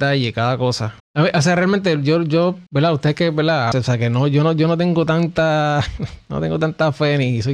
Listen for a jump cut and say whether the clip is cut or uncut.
cut